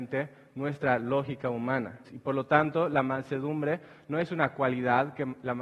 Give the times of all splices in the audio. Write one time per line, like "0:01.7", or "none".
0:02.1